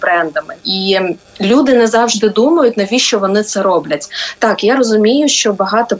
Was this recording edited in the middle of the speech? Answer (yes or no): no